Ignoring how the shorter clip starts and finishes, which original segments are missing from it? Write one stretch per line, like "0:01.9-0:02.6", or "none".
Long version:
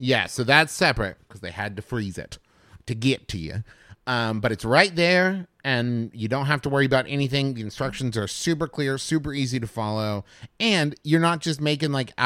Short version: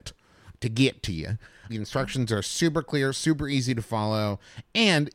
0:03.9-0:07.5